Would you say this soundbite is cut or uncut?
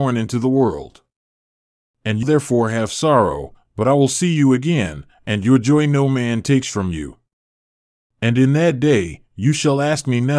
cut